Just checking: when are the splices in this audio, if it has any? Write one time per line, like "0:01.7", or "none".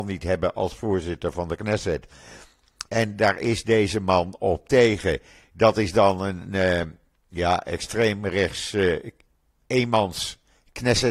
0:02.9